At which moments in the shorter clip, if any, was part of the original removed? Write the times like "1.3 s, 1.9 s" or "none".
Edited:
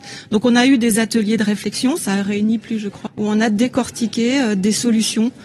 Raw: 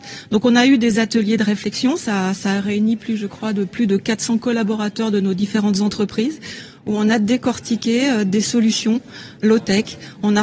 2.0 s, 3.1 s

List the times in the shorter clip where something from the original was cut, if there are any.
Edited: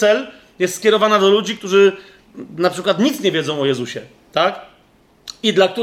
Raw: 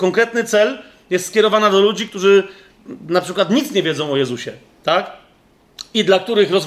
none

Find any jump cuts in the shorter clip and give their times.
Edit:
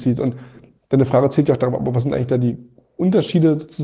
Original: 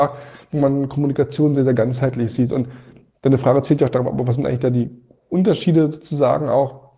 none

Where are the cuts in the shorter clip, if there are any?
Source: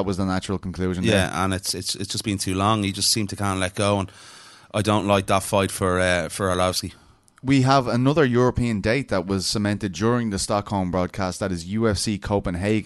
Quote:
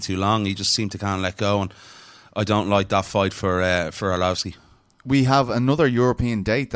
none

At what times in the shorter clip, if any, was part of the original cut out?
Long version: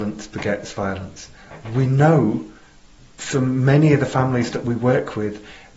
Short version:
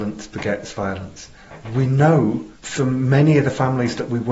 2.5 s

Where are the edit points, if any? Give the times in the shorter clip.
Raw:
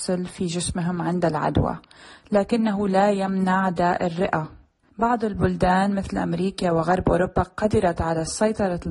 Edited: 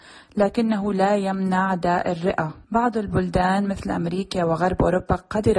2.6 s

